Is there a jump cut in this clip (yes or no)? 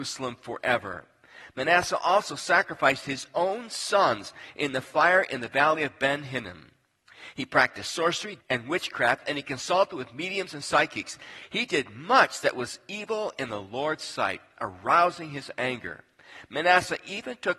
yes